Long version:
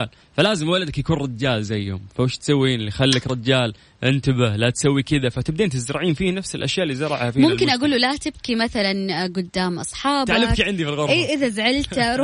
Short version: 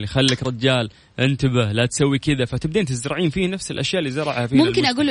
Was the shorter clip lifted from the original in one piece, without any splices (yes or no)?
yes